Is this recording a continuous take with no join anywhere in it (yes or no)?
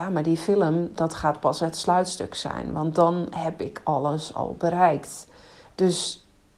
yes